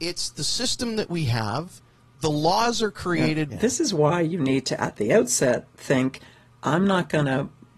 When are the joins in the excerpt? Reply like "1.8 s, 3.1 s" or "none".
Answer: 3.5 s